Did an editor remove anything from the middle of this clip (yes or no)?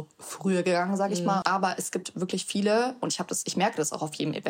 yes